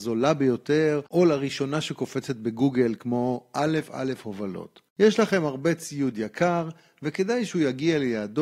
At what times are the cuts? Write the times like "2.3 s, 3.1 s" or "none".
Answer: 3.9 s